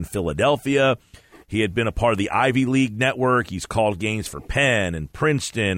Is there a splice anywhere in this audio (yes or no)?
no